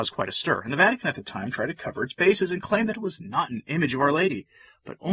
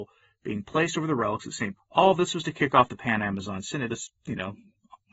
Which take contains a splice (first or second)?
second